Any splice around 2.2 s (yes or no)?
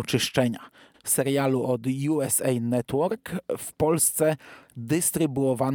no